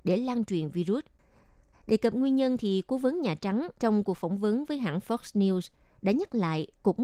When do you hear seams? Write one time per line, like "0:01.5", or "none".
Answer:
0:01.7
0:03.8